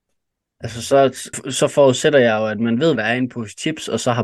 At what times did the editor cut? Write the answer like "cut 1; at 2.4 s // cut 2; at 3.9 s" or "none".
cut 1; at 1.3 s // cut 2; at 3.0 s

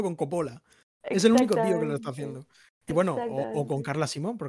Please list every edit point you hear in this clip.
none

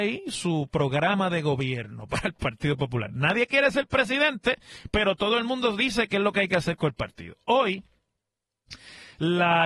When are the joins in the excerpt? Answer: none

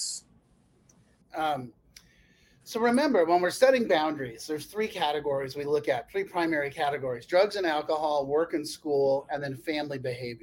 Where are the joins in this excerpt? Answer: cut 1; at 1.2 s

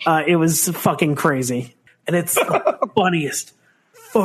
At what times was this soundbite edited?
cut 1; at 1.9 s

